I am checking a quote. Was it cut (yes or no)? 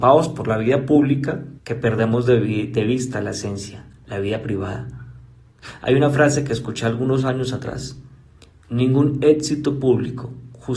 yes